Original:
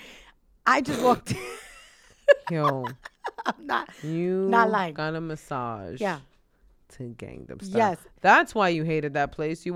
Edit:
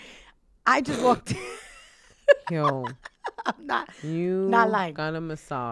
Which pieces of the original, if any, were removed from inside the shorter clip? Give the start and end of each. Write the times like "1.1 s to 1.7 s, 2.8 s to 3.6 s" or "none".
none

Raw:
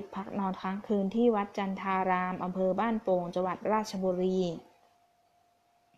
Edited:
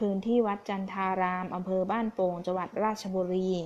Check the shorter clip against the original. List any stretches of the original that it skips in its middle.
none

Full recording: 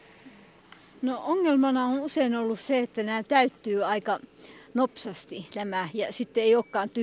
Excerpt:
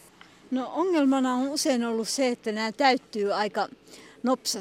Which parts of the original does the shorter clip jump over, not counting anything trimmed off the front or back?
none

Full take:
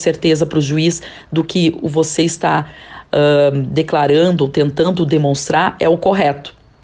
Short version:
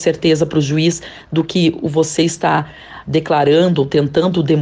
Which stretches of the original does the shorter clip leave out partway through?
3.1 s to 3.7 s

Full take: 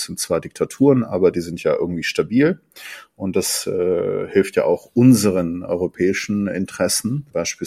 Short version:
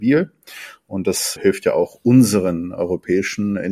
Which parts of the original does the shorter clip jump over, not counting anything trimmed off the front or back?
3.6 s to 4.3 s

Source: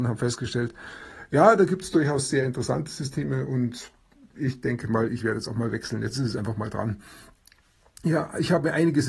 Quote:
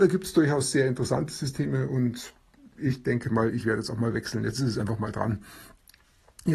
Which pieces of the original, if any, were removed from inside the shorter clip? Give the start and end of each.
none

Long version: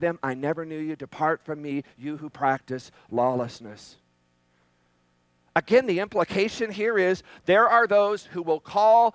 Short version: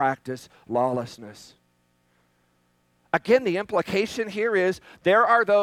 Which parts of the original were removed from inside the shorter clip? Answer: none

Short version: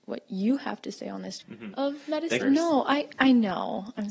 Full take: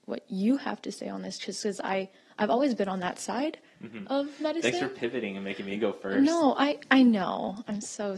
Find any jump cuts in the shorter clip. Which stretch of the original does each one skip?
1.4 s to 3.7 s, 4.7 s to 6.1 s

